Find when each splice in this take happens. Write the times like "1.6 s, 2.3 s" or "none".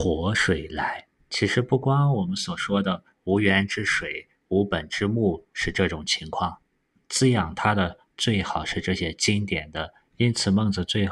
1.2 s, 7.0 s, 10.1 s